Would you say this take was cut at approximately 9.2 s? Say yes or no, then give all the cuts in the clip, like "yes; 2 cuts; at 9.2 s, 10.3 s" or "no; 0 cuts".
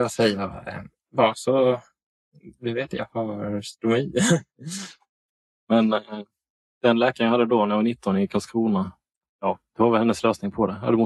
yes; 1 cut; at 9.2 s